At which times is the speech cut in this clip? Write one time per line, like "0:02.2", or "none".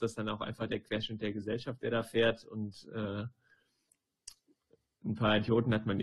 none